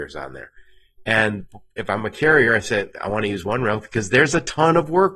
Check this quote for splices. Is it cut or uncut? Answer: uncut